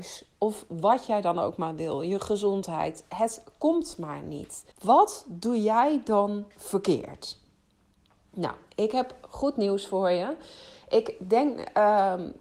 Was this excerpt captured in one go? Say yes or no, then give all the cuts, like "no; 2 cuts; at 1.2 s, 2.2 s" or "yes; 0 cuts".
no; 1 cut; at 4.7 s